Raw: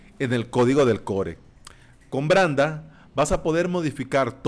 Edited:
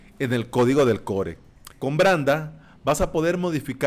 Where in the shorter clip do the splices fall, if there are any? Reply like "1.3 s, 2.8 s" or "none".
1.7 s